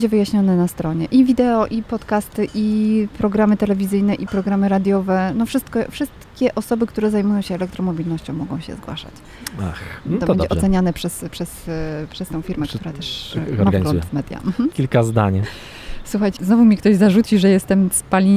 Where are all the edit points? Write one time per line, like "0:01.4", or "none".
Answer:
0:14.7
0:16.4